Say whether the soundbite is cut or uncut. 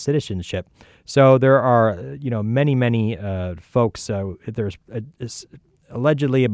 uncut